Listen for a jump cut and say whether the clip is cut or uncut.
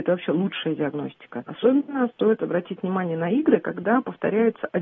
cut